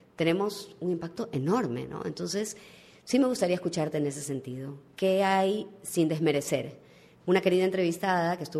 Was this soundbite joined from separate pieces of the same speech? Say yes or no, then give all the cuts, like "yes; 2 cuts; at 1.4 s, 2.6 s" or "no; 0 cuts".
yes; 1 cut; at 7.2 s